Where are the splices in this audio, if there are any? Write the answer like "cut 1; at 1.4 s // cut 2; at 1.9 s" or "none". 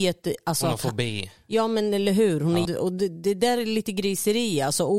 cut 1; at 2.7 s